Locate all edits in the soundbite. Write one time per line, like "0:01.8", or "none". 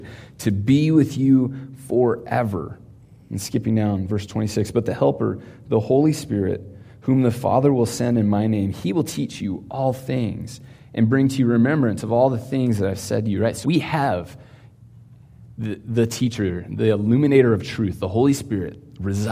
0:13.6